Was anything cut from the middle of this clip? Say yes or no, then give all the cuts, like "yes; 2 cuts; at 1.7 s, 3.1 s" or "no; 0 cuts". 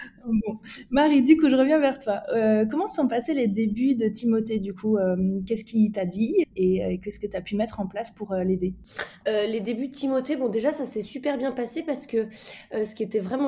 yes; 2 cuts; at 6.4 s, 9.2 s